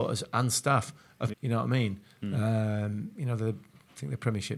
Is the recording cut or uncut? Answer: cut